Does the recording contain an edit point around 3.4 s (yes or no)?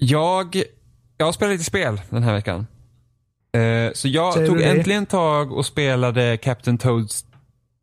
yes